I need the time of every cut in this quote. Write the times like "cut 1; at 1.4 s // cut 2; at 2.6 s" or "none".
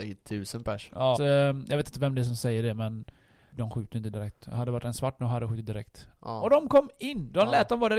cut 1; at 1.2 s // cut 2; at 3.5 s // cut 3; at 6.2 s